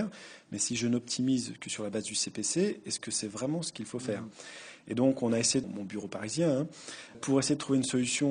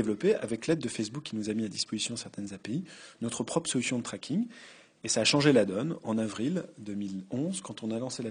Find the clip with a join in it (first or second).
first